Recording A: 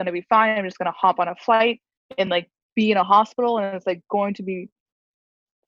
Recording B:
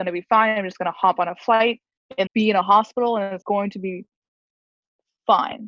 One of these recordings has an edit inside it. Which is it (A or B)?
B